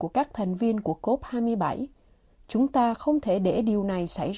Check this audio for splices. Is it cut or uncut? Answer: uncut